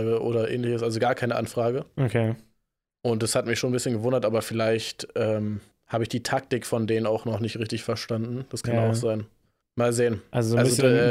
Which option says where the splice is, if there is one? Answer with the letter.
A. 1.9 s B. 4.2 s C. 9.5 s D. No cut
D